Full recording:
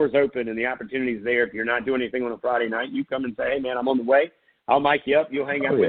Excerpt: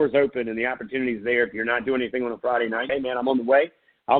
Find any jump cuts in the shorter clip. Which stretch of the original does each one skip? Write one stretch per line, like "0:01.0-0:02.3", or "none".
0:02.9-0:03.5